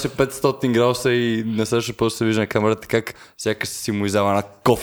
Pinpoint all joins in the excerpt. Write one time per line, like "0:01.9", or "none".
none